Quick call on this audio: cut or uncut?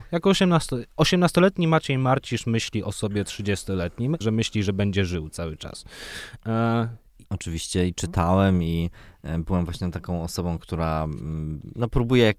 cut